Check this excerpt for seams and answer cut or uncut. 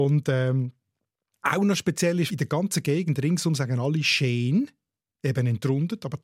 uncut